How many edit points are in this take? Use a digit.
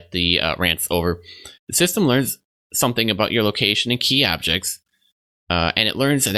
1